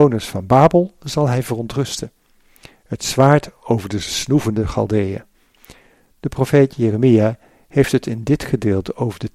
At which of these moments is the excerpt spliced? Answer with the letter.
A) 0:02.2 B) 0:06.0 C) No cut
C